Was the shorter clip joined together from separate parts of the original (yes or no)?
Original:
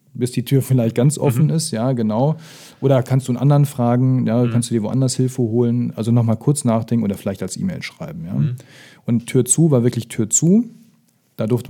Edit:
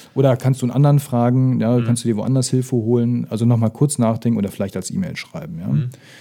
no